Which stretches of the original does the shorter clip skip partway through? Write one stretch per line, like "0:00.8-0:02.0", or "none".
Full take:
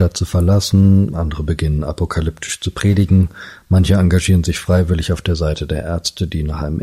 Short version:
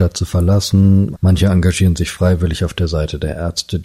0:01.1-0:03.6